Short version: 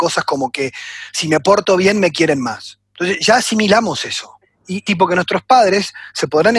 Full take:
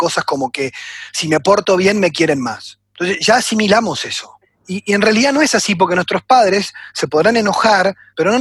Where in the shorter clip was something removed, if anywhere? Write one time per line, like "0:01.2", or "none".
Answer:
0:04.9